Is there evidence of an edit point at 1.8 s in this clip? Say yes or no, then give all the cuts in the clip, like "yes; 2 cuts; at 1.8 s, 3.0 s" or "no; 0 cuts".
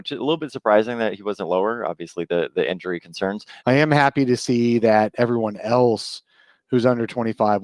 no; 1 cut; at 3.6 s